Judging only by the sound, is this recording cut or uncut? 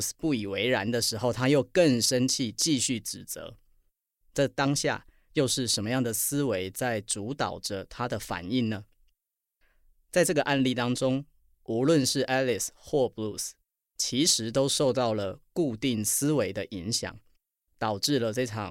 uncut